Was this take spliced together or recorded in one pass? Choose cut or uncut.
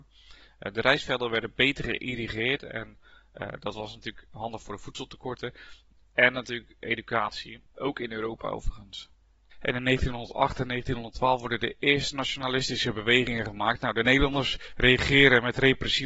cut